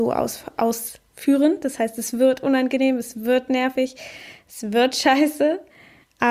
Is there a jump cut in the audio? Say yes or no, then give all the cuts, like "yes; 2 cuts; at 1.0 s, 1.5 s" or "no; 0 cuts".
no; 0 cuts